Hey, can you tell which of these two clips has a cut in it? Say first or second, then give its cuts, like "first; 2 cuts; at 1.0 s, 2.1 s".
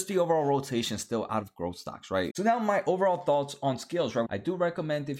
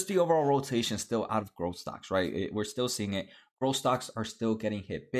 first; 2 cuts; at 2.3 s, 4.3 s